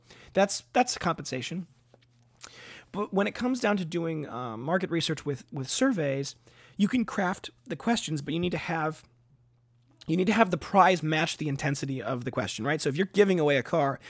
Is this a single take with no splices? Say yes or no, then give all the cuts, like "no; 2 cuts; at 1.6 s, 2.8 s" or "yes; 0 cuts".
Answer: yes; 0 cuts